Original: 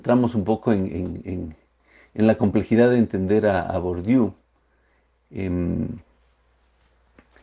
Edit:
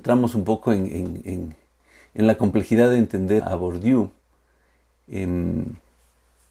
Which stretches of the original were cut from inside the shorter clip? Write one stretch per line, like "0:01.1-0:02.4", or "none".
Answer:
0:03.4-0:03.6